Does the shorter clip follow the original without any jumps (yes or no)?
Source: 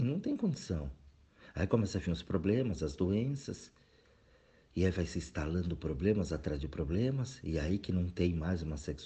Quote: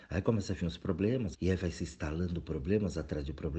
no